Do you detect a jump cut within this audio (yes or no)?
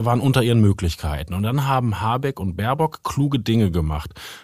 no